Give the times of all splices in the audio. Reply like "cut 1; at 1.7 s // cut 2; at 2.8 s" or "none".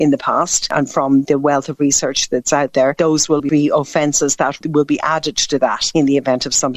cut 1; at 3.4 s